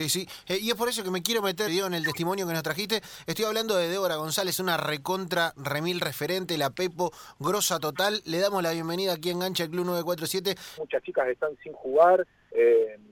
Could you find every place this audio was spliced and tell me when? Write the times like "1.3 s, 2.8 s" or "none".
1.7 s, 10.8 s